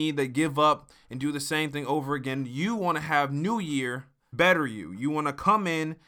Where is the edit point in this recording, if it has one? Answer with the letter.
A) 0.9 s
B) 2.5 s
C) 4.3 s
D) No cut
C